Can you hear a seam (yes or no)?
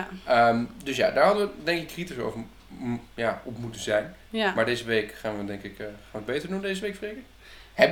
no